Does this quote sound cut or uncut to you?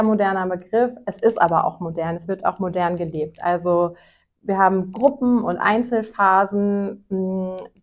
uncut